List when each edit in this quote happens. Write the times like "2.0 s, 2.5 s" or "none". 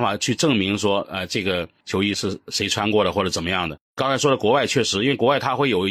none